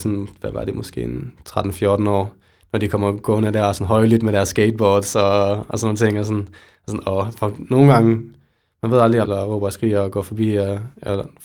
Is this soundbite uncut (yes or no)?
no